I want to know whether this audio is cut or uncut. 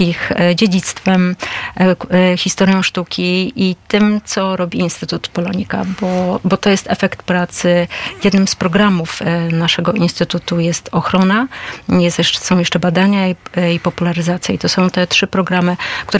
uncut